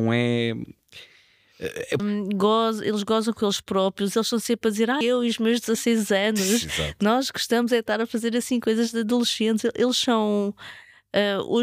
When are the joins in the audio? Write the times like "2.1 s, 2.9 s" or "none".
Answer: 2.0 s, 5.0 s